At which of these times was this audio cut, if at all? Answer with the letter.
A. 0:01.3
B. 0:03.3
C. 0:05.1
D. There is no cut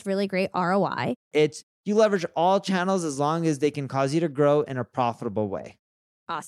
A